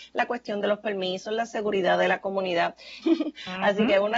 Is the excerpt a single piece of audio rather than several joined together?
no; 1 cut; at 3.0 s

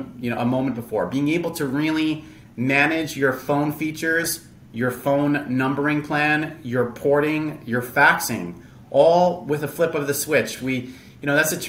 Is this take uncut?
yes; 0 cuts

